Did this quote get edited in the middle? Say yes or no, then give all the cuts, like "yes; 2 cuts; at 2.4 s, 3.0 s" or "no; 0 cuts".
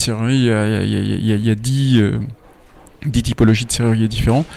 no; 0 cuts